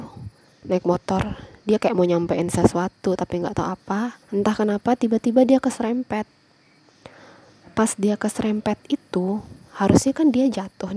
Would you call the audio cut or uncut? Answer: cut